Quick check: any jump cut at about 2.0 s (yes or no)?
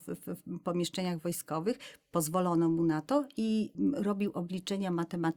no